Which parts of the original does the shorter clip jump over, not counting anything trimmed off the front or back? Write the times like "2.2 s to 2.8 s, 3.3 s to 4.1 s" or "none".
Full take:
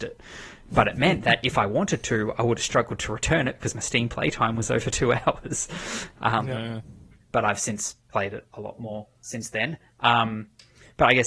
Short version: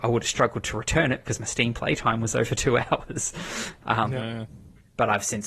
none